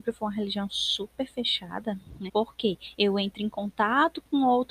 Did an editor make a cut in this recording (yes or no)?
yes